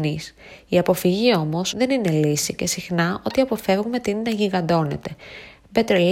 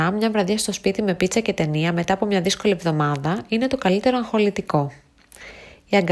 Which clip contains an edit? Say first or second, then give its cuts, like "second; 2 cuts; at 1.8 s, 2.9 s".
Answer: first; 1 cut; at 1.7 s